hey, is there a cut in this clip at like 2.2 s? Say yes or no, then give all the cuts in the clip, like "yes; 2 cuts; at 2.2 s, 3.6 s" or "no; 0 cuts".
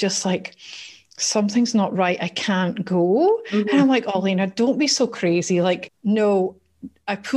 no; 1 cut; at 5.9 s